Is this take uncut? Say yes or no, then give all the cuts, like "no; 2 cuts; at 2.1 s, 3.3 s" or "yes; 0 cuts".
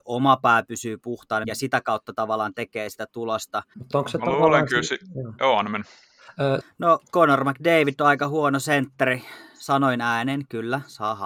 no; 3 cuts; at 1.4 s, 3.7 s, 6.6 s